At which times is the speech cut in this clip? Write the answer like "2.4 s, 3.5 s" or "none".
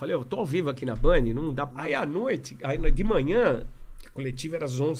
1.7 s

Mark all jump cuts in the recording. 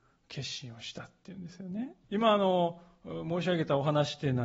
2.0 s

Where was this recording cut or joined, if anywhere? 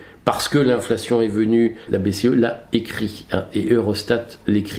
1.9 s

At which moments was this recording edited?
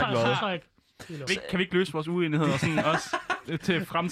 1.3 s

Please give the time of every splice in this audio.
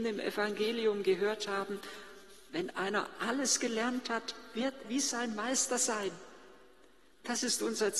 4.8 s

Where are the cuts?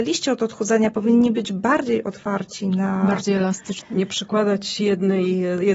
3.8 s

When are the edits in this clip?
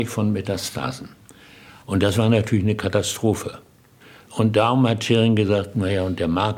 none

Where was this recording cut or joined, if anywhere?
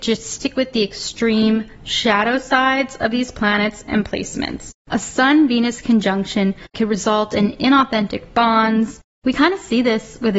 4.8 s

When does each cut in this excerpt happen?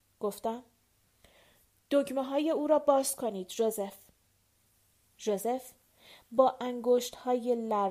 none

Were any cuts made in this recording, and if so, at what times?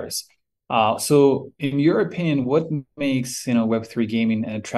none

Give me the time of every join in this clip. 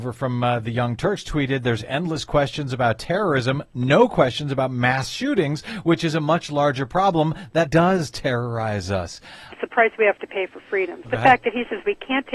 7.7 s, 9.5 s, 11.0 s

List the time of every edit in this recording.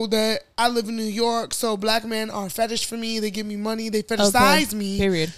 none

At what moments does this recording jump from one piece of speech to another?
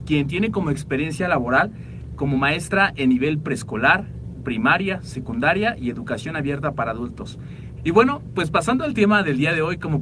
7.8 s

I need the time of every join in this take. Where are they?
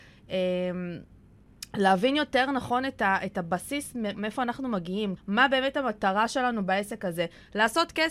4.1 s, 5.2 s

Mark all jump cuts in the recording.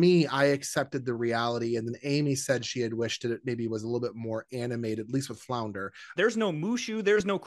6.2 s

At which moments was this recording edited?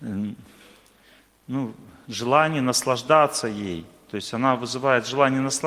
none

